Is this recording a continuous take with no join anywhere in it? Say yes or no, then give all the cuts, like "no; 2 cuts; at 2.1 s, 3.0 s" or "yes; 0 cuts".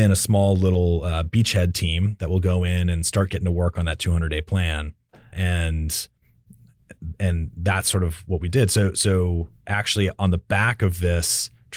yes; 0 cuts